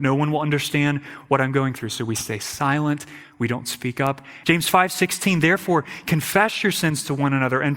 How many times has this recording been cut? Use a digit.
1